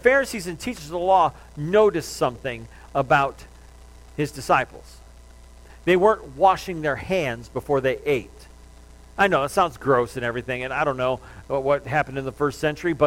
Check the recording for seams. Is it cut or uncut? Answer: uncut